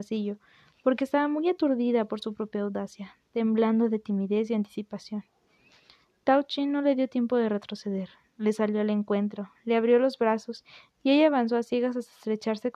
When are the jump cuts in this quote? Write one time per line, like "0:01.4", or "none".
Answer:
none